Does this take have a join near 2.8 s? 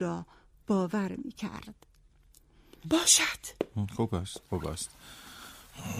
yes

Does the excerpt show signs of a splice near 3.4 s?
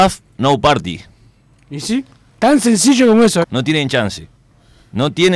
yes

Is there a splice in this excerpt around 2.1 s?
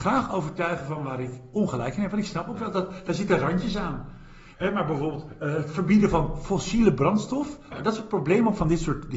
no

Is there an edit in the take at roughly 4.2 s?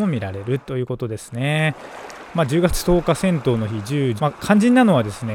yes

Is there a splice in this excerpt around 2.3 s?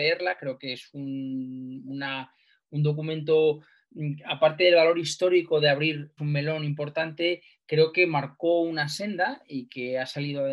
no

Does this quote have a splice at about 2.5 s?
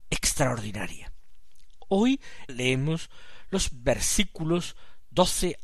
yes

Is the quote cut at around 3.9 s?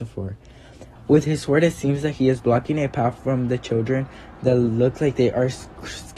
no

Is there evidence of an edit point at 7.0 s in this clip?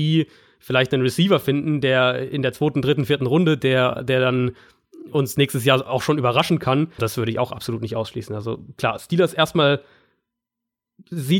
yes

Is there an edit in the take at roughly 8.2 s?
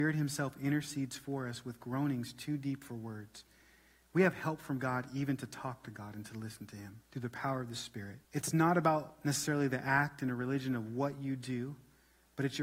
yes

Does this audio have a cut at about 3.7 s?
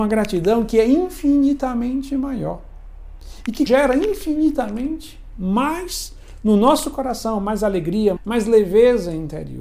yes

